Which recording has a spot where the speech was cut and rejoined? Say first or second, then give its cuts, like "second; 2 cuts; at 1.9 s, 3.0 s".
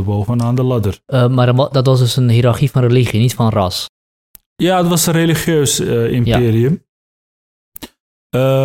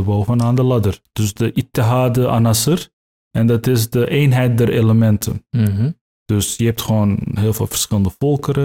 second; 1 cut; at 1.1 s